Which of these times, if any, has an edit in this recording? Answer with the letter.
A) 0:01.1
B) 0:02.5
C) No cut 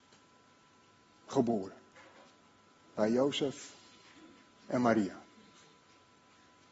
C